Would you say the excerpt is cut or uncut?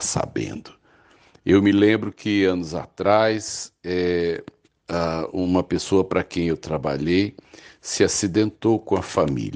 uncut